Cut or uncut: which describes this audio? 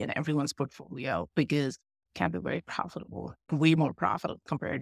cut